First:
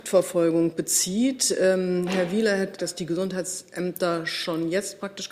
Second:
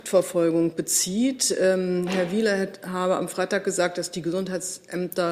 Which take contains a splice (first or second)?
first